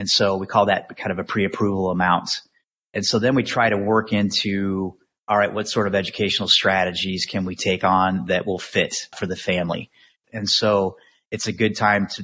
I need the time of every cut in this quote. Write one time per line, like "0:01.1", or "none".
0:10.2